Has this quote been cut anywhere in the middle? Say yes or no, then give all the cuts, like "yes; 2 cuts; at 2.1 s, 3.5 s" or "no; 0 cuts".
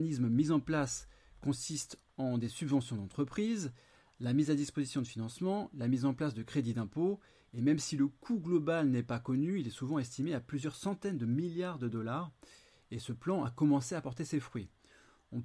no; 0 cuts